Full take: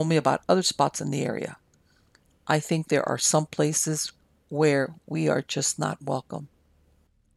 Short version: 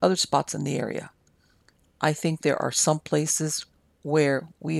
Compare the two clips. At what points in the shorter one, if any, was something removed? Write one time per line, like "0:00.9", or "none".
none